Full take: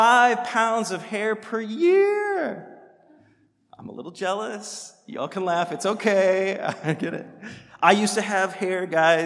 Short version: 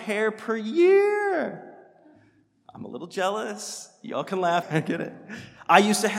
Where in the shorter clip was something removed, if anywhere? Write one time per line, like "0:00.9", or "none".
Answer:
0:04.6